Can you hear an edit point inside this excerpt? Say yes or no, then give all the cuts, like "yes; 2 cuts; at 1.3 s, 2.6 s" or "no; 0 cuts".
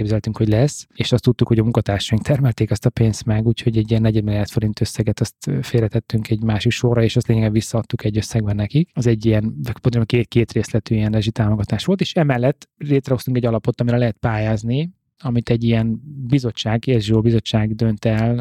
no; 0 cuts